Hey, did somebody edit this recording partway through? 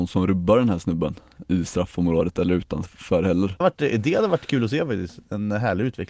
yes; 1 cut; at 3.6 s

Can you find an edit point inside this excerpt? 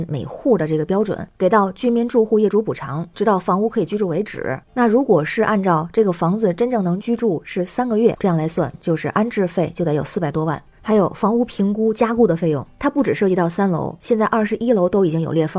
no; 0 cuts

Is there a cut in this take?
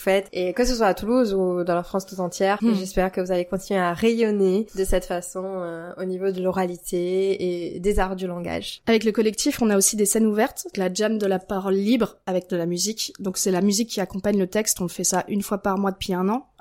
yes; 1 cut; at 10.7 s

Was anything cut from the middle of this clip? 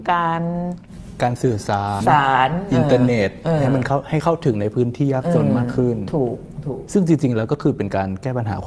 yes; 1 cut; at 2.0 s

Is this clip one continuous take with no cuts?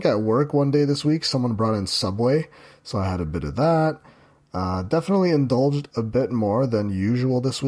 yes; 0 cuts

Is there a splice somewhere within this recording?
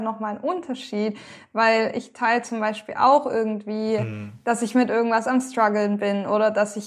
no; 0 cuts

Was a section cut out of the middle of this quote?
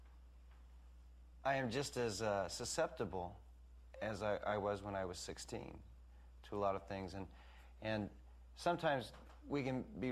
no; 0 cuts

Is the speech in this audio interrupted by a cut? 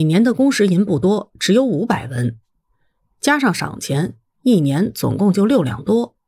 no; 0 cuts

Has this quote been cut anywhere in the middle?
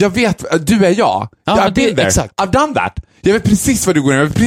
no; 0 cuts

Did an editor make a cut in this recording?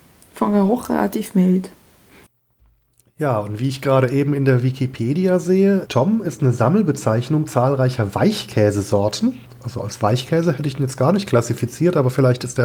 yes; 1 cut; at 5.8 s

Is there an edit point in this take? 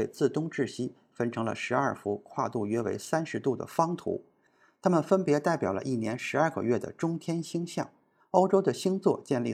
yes; 1 cut; at 8.2 s

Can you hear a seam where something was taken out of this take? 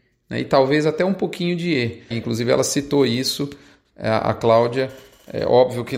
yes; 1 cut; at 2.1 s

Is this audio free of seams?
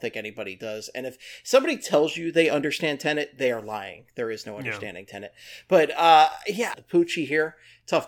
no; 1 cut; at 6.7 s

